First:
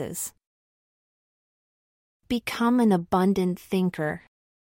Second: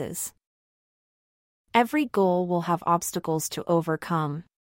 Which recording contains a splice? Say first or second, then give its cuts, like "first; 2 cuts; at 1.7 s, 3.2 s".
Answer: second; 1 cut; at 1.5 s